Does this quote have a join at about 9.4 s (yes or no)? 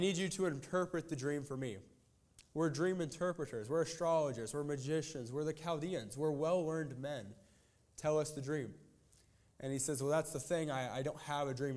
no